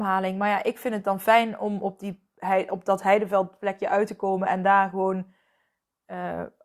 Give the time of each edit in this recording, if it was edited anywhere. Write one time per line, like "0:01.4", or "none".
none